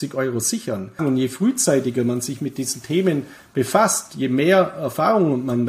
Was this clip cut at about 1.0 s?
yes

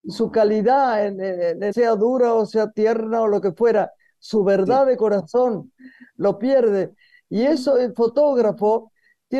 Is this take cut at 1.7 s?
yes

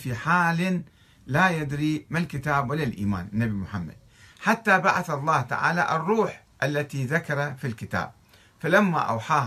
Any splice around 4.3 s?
no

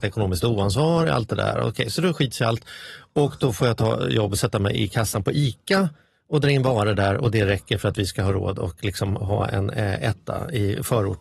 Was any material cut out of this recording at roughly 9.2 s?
yes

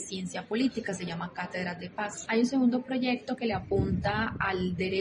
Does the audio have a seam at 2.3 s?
yes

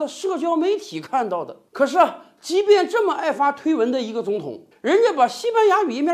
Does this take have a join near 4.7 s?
yes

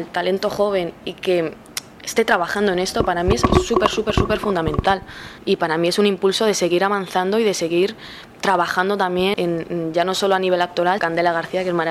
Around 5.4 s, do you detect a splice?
yes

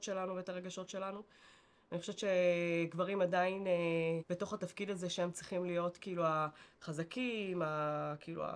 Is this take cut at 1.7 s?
no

